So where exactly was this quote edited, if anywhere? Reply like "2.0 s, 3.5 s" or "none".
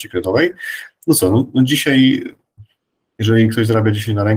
none